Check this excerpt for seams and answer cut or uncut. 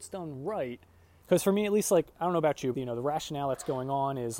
cut